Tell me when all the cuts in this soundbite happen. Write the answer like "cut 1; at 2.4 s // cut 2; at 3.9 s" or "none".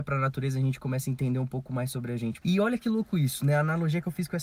cut 1; at 2.4 s

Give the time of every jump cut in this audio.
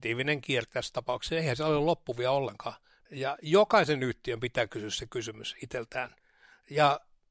cut 1; at 3.1 s

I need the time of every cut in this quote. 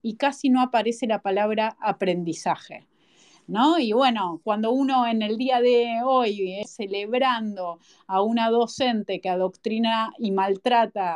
cut 1; at 4.4 s // cut 2; at 6.6 s

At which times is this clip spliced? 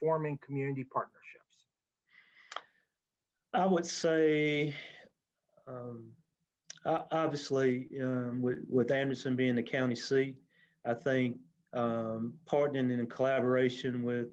none

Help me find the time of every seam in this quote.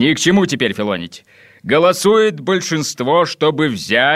none

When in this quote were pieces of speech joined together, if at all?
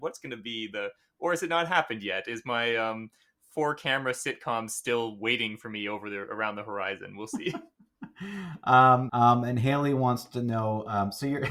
cut 1; at 9.1 s

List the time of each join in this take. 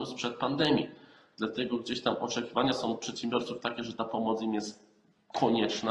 none

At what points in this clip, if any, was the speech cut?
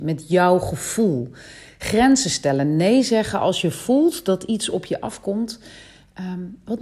none

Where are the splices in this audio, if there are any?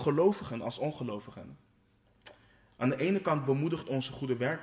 none

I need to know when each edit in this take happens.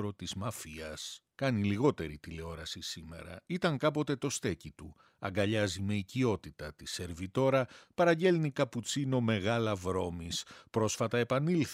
cut 1; at 3.5 s

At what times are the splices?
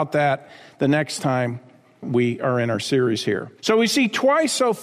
cut 1; at 3.6 s

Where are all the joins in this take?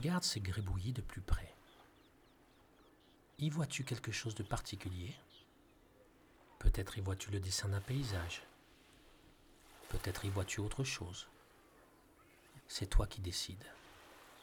cut 1; at 12.6 s

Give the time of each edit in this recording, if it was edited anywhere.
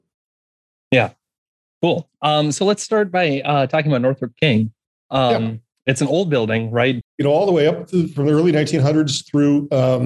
cut 1; at 7.0 s

